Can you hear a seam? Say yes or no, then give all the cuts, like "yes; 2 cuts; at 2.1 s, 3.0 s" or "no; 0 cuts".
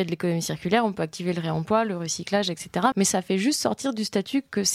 yes; 1 cut; at 2.9 s